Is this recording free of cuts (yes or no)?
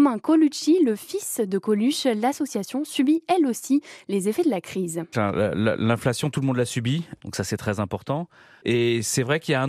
no